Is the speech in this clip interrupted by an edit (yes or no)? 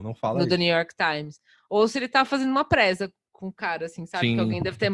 no